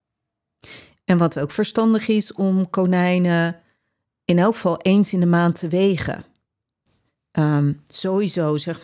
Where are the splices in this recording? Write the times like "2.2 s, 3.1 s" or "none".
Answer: 0.9 s